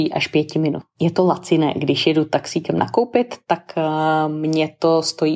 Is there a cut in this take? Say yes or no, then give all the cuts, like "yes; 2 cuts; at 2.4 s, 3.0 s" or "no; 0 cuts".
no; 0 cuts